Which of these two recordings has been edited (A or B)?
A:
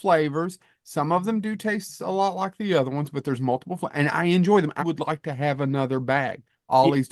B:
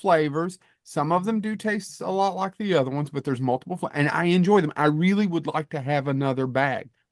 A